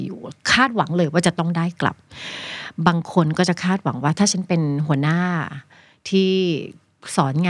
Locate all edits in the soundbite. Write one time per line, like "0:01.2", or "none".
none